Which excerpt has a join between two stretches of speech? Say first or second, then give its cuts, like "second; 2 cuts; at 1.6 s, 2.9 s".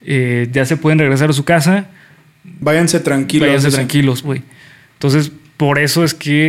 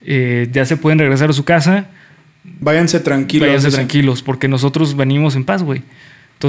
first; 1 cut; at 4.2 s